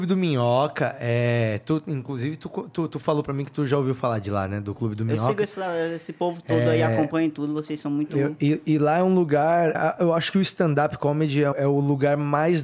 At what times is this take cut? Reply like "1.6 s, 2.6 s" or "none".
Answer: 9.7 s, 11.5 s